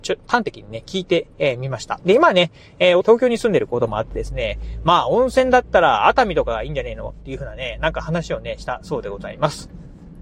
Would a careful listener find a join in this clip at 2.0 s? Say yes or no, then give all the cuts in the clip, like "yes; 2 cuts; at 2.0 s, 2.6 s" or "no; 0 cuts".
yes; 2 cuts; at 2.0 s, 3.0 s